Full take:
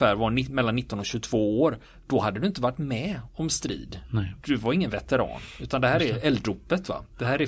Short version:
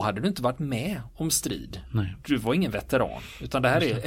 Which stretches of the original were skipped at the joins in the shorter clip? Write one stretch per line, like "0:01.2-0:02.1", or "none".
none